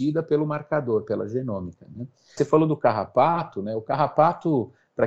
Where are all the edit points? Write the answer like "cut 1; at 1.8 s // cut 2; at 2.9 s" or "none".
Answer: cut 1; at 2.4 s